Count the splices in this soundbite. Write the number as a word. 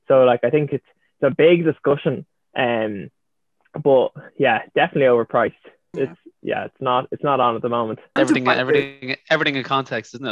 two